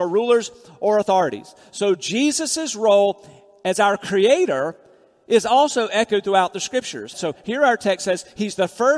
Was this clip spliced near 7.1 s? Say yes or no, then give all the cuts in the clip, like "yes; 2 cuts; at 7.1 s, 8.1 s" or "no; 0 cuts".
yes; 1 cut; at 7.1 s